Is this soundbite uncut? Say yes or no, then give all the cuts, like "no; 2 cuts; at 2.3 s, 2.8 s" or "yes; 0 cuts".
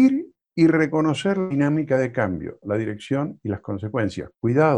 no; 1 cut; at 2.6 s